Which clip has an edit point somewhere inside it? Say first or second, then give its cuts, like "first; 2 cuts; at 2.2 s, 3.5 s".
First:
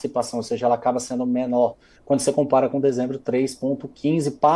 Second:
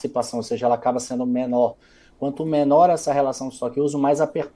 first; 1 cut; at 2.0 s